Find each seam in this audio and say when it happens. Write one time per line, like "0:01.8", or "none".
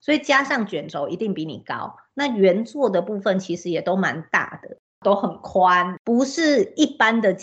0:06.0